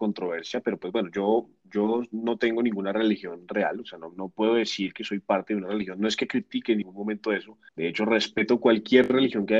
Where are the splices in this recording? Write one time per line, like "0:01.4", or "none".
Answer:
0:07.7

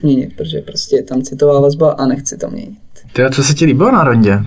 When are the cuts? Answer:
0:03.1

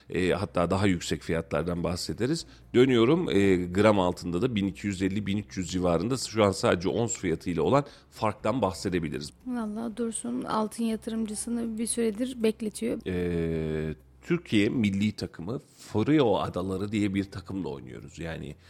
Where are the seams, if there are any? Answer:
0:09.3
0:13.0

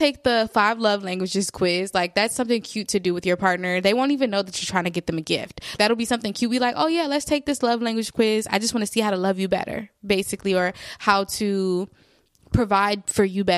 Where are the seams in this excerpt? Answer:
0:05.8

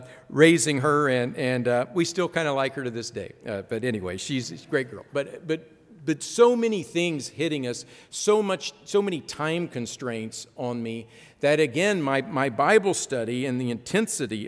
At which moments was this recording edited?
none

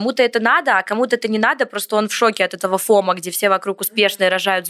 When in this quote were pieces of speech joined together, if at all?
none

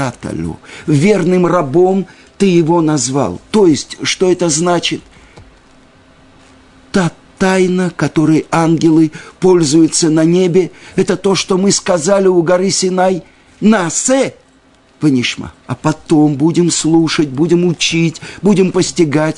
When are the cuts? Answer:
0:15.6

